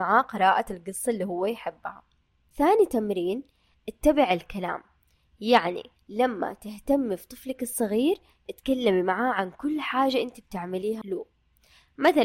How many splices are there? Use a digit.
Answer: 0